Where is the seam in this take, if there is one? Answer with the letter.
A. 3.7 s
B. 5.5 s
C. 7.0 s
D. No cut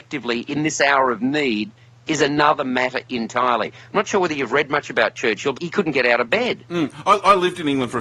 B